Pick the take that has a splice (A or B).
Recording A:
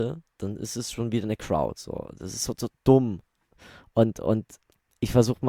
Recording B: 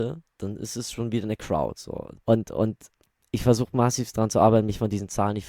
B